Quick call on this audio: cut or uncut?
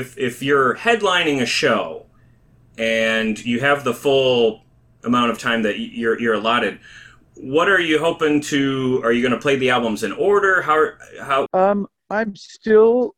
cut